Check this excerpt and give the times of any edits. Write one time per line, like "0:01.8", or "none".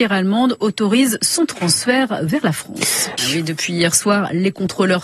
0:03.2